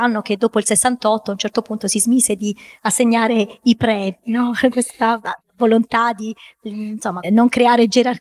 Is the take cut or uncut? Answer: cut